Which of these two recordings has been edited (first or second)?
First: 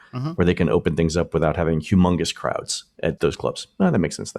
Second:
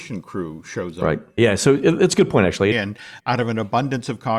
second